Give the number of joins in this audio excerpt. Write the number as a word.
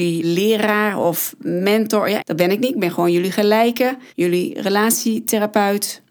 one